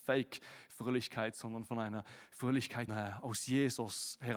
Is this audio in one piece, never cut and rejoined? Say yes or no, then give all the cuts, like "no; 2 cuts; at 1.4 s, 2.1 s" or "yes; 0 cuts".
no; 1 cut; at 2.9 s